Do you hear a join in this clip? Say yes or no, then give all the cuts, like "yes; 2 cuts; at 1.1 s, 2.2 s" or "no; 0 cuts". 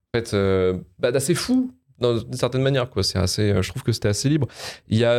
no; 0 cuts